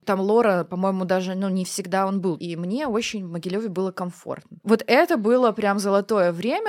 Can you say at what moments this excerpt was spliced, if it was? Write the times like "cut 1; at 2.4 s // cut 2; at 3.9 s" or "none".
cut 1; at 2.4 s // cut 2; at 4.6 s